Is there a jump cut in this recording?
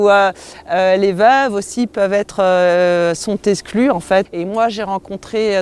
yes; 1 cut; at 4.3 s

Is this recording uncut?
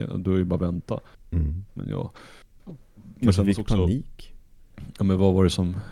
yes; 0 cuts

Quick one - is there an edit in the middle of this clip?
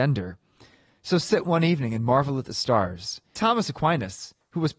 yes; 1 cut; at 3.4 s

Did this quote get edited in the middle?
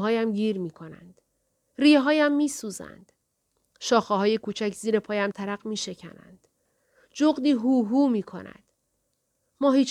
yes; 1 cut; at 5.3 s

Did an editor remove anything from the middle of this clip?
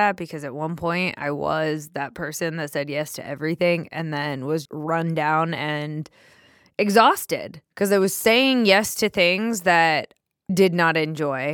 yes; 3 cuts; at 4.6 s, 7.7 s, 10.5 s

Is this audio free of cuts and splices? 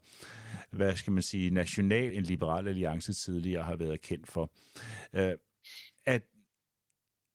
no; 1 cut; at 2.1 s

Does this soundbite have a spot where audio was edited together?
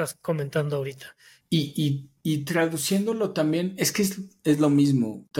yes; 1 cut; at 1.4 s

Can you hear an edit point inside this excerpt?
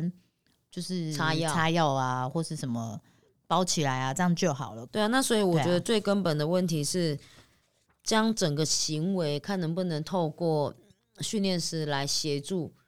yes; 1 cut; at 4.9 s

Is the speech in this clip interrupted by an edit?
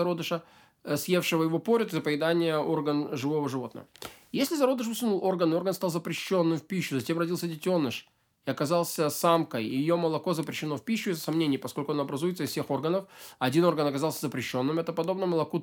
no; 0 cuts

